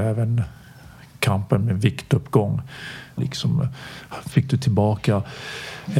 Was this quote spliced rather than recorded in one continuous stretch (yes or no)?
yes